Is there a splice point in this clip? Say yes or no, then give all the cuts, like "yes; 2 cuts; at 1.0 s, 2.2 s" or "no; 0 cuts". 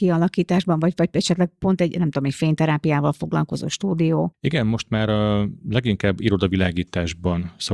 no; 0 cuts